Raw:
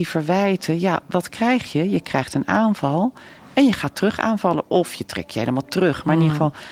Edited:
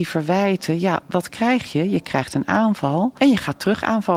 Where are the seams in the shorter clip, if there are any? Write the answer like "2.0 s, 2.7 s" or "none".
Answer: 3.2 s